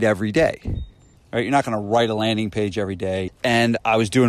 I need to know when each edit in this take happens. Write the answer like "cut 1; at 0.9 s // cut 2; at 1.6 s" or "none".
cut 1; at 1.2 s // cut 2; at 3.3 s